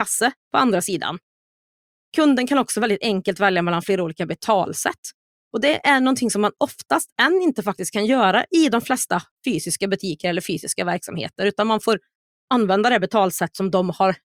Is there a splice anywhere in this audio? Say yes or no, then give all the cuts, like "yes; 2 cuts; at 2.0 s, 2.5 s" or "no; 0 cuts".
no; 0 cuts